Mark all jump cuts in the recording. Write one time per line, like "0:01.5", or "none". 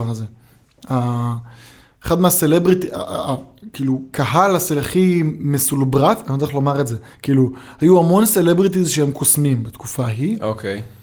none

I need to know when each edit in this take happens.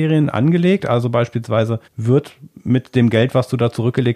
0:01.9

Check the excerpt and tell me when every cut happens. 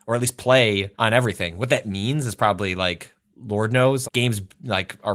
0:00.9
0:04.0

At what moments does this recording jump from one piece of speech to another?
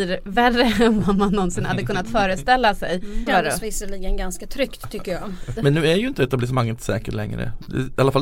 0:03.3
0:05.6

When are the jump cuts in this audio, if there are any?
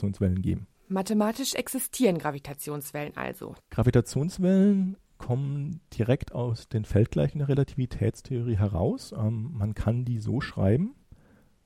0:03.6
0:05.0

